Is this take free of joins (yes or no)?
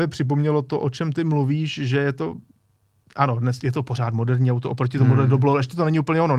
yes